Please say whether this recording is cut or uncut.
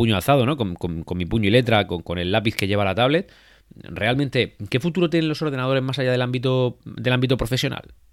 uncut